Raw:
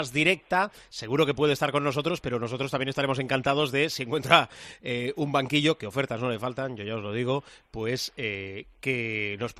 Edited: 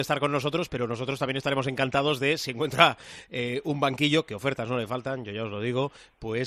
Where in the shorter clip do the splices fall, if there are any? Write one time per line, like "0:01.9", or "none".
none